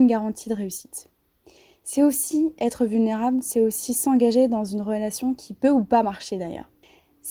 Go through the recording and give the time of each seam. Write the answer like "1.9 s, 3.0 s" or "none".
none

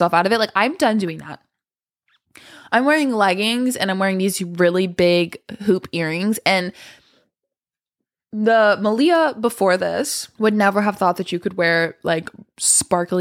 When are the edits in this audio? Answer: 10.3 s

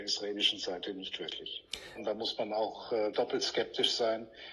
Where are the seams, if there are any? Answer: 2.0 s, 3.1 s

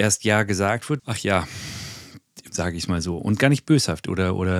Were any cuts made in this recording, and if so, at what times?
1.0 s, 2.5 s

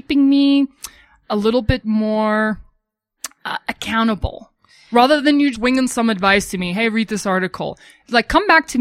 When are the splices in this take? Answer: 5.5 s

